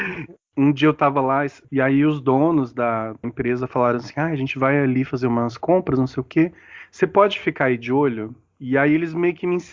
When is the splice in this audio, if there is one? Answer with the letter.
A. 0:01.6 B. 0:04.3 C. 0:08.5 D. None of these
D